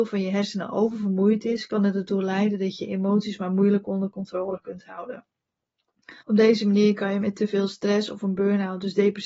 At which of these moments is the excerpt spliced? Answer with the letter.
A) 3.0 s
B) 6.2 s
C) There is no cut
B